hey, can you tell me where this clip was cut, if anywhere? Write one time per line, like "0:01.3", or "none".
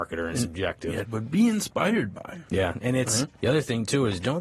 0:01.0